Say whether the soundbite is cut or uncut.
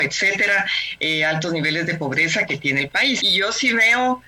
cut